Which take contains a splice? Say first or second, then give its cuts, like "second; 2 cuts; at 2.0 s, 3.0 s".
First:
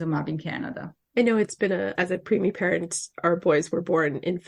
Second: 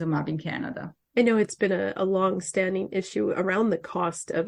first; 1 cut; at 1.9 s